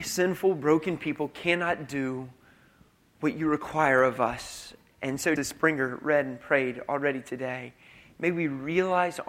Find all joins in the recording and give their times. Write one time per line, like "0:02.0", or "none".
0:05.4